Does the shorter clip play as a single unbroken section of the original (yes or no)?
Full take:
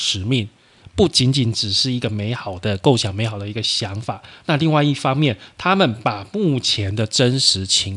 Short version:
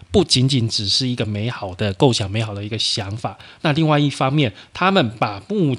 yes